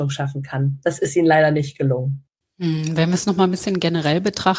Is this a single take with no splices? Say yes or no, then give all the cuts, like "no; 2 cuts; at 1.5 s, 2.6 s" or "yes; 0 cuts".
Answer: yes; 0 cuts